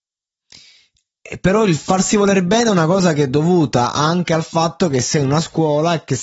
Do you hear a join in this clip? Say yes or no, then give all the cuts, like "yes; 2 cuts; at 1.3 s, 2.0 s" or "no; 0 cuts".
no; 0 cuts